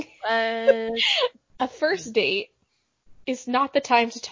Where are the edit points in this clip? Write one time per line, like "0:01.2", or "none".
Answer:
none